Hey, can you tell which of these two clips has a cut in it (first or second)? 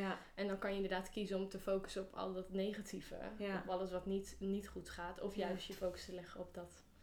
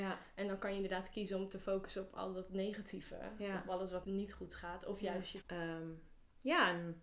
second